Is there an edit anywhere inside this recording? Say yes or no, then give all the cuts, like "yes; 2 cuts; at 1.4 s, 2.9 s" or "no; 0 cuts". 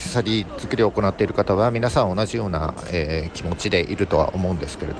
no; 0 cuts